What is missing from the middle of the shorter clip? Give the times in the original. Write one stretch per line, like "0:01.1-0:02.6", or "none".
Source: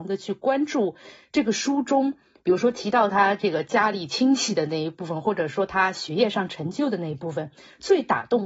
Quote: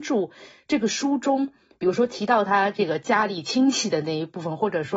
none